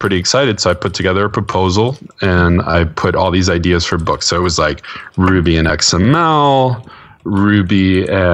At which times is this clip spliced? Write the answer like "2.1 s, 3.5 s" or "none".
none